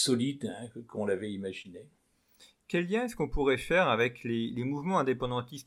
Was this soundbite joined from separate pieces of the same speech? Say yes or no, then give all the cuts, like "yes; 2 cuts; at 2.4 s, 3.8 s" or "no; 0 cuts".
no; 0 cuts